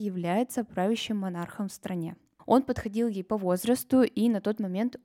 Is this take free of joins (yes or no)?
no